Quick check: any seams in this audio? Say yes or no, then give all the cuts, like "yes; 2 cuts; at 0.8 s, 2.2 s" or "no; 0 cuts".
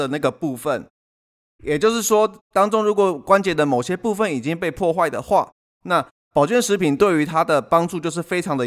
no; 0 cuts